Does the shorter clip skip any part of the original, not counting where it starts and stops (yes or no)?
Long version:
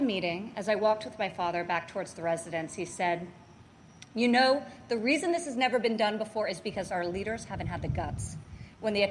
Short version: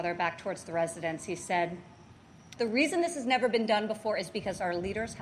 yes